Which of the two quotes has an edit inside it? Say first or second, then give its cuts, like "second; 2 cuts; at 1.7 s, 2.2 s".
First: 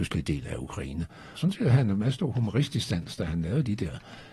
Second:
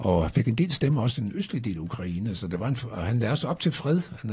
first; 1 cut; at 1.4 s